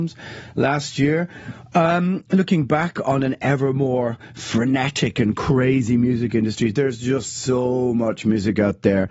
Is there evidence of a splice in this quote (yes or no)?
no